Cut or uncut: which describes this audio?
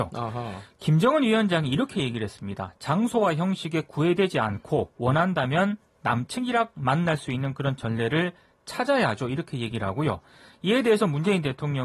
uncut